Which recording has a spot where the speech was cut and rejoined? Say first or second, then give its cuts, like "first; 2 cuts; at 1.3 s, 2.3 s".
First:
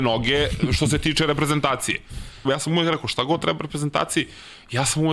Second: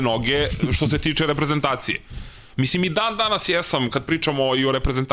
first; 1 cut; at 2.4 s